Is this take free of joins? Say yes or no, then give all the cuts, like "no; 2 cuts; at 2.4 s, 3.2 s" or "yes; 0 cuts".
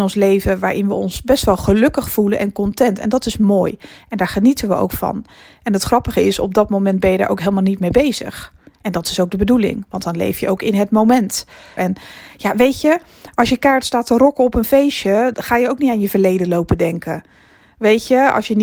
no; 2 cuts; at 11.8 s, 15.3 s